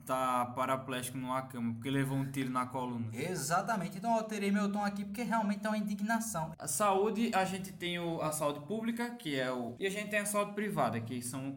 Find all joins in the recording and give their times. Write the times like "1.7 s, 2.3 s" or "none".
6.5 s, 9.8 s